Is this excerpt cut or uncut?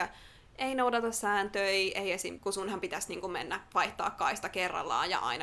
cut